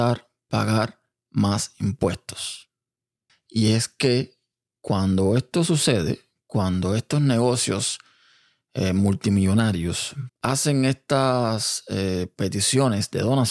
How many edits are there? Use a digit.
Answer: 2